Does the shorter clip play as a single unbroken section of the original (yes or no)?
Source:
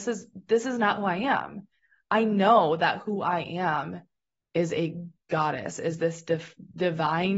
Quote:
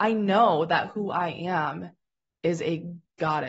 yes